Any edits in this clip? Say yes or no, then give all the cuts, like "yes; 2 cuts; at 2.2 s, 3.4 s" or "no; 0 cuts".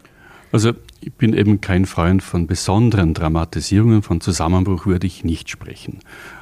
no; 0 cuts